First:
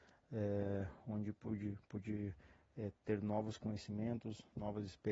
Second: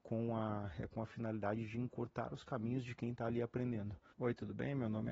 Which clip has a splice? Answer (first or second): second